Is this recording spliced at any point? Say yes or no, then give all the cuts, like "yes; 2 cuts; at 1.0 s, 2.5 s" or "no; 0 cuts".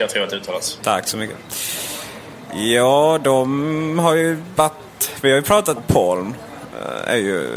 yes; 1 cut; at 5.8 s